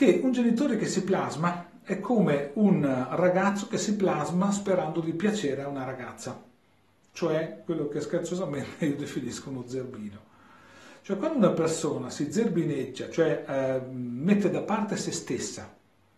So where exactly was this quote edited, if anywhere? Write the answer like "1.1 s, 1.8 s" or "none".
none

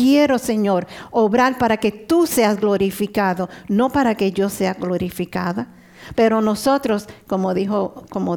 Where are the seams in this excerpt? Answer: 6.1 s

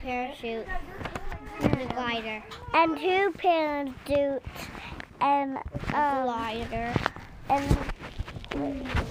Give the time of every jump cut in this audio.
none

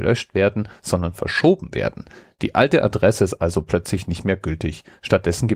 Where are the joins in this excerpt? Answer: none

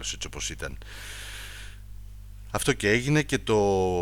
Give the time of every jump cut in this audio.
none

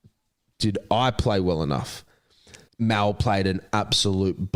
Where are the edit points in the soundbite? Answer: 2.7 s

